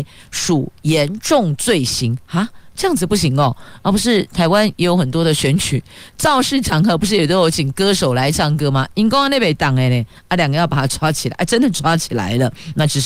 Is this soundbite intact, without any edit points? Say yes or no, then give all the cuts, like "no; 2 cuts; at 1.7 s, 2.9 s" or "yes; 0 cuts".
yes; 0 cuts